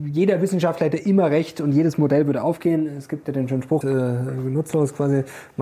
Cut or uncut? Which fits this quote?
cut